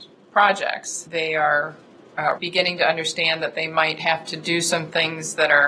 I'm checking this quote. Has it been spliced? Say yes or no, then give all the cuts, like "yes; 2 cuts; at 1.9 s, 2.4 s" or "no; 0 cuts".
yes; 1 cut; at 2.4 s